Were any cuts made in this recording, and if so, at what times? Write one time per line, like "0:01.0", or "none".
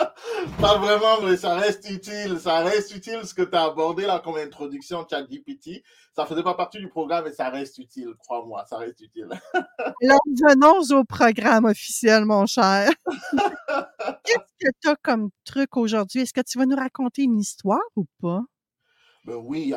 0:01.2